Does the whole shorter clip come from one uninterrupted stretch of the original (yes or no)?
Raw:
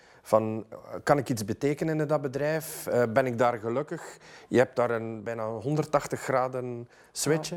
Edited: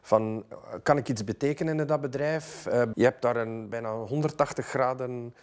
no